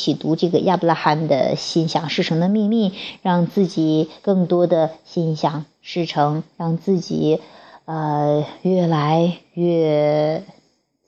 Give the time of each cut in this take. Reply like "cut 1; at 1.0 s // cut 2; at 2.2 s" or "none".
cut 1; at 6.5 s